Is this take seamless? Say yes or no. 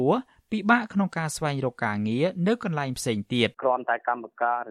no